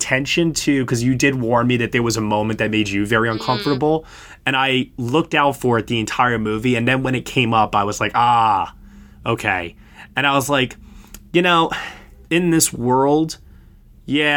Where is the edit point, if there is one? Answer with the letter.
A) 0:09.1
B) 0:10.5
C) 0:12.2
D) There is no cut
C